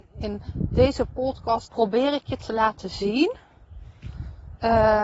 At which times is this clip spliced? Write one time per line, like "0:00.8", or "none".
0:01.7